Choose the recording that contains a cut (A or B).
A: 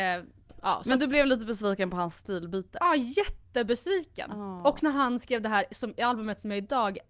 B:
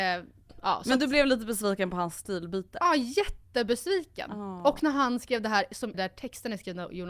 B